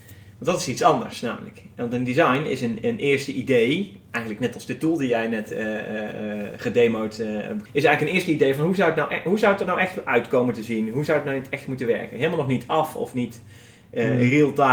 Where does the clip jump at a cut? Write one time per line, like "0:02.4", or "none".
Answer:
0:07.7